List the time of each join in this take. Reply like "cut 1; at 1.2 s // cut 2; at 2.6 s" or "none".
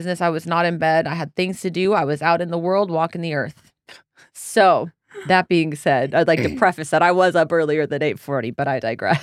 none